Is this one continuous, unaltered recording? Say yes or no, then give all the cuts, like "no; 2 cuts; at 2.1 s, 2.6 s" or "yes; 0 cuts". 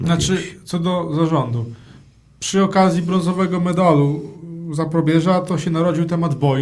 yes; 0 cuts